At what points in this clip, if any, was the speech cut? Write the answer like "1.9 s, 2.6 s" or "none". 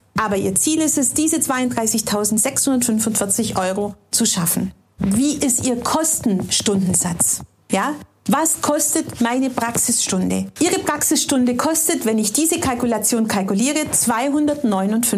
5.0 s